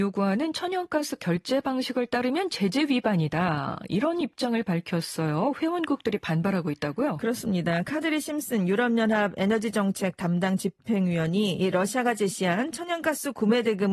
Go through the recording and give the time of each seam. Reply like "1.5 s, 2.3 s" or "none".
none